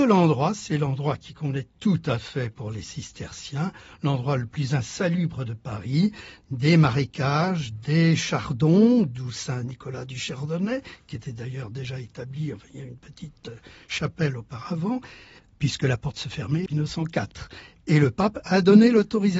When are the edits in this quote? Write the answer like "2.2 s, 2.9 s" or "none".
15.4 s, 16.7 s